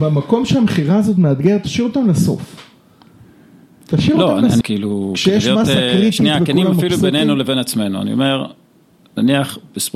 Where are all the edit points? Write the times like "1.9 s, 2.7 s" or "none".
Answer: 4.6 s